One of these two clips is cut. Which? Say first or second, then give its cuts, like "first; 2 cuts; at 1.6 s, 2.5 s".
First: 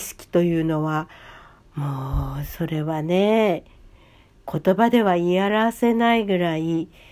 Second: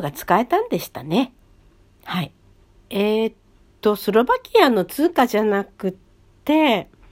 second; 1 cut; at 2.7 s